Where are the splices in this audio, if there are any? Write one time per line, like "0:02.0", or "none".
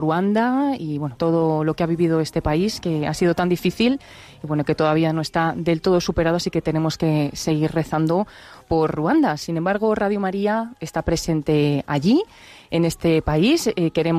0:01.2